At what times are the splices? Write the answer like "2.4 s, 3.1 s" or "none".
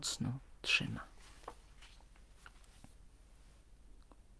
none